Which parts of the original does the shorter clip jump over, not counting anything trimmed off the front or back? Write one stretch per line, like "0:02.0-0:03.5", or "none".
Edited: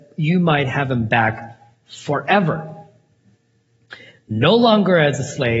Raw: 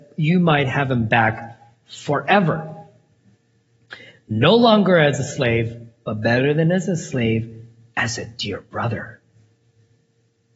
none